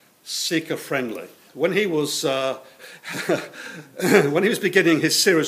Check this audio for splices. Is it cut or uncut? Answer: cut